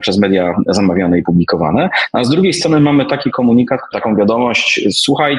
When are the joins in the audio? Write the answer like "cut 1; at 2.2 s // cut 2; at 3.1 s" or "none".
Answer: cut 1; at 3.9 s